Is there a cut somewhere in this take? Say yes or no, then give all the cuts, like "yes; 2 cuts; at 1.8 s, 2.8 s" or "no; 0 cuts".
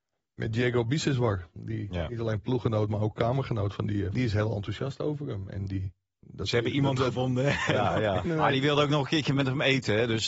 yes; 2 cuts; at 4.1 s, 8.3 s